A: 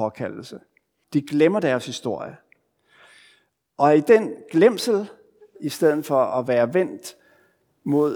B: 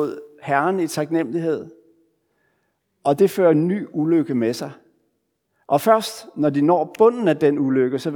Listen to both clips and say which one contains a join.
A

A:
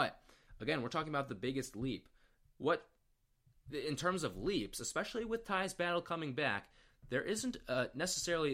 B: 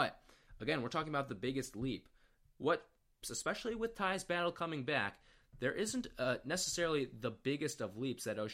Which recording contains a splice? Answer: B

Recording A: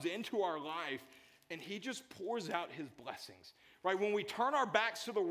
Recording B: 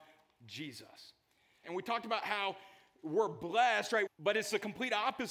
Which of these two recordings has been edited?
B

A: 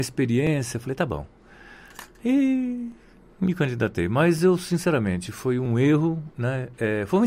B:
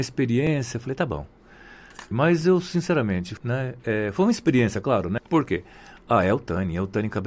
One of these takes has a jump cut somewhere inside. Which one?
B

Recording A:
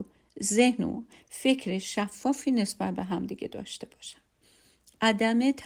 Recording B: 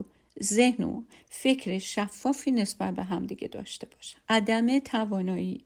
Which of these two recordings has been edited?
B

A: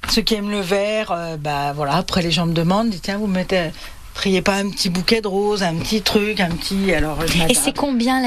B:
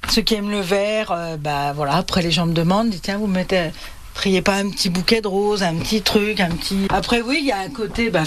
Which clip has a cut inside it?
B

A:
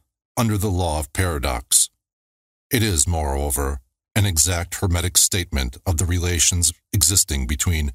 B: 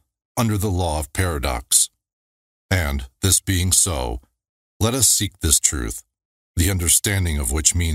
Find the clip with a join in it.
B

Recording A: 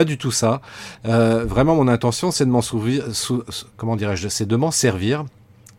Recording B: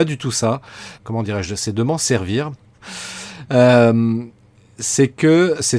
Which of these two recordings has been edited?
B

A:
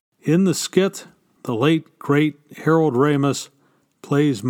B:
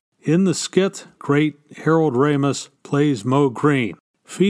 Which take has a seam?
B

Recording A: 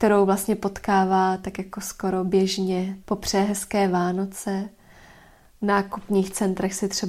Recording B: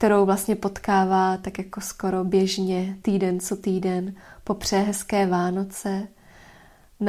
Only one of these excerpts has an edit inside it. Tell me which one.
A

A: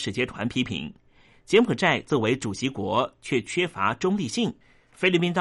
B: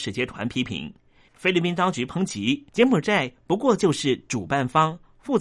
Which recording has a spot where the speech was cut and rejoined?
B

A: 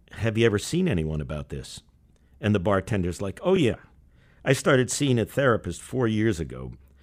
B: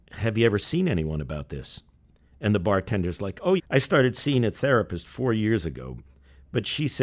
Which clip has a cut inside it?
B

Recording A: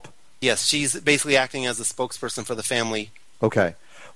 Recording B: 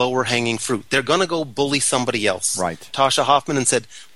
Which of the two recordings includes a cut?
B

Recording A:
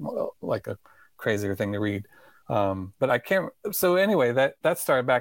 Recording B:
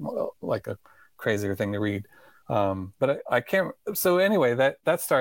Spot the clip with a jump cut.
A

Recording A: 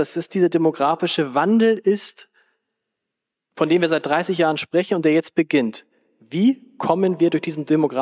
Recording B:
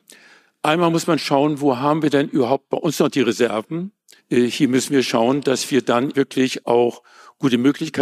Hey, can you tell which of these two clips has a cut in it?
B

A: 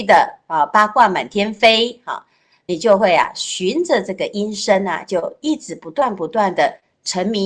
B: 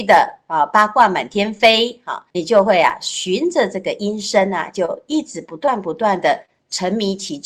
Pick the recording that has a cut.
B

